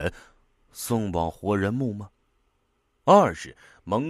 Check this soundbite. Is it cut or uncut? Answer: uncut